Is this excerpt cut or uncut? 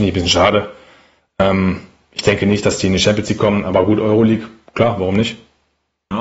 uncut